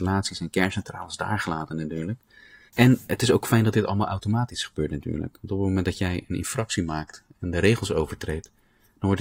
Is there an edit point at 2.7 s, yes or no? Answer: yes